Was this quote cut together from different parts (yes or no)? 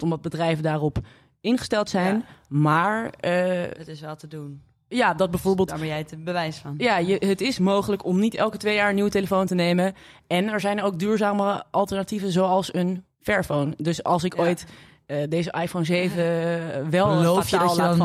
no